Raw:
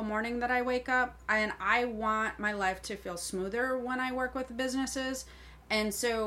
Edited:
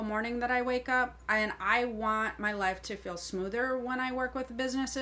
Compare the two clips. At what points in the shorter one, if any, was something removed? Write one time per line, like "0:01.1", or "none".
none